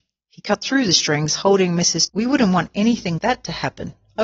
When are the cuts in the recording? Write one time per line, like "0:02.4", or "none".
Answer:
0:02.1
0:03.2

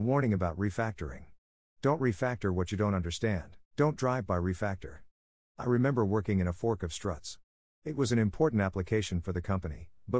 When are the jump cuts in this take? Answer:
0:03.6
0:05.4

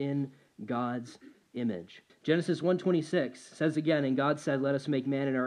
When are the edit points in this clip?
0:02.1

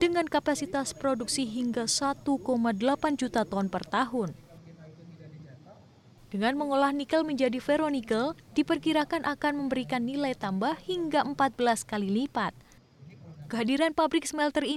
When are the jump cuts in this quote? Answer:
none

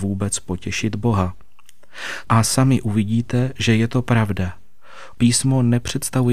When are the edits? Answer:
0:02.2
0:05.1

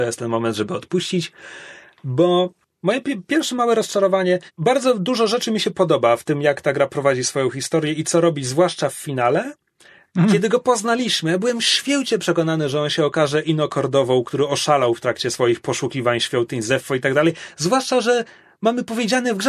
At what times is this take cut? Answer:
0:04.5
0:10.1

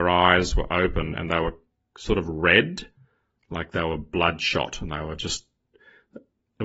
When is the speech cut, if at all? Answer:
none

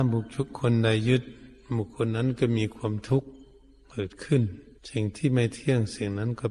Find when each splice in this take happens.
0:04.8

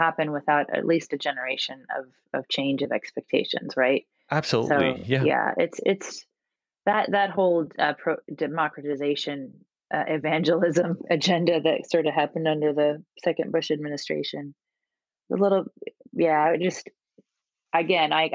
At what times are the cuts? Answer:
none

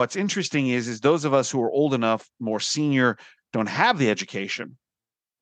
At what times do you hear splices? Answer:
0:03.4

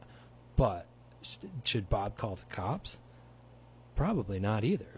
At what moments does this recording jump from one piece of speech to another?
none

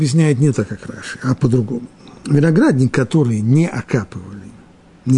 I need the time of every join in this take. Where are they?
none

